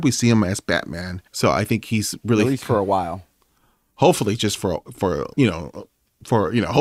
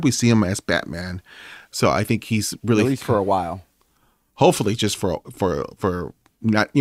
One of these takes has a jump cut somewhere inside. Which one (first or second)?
first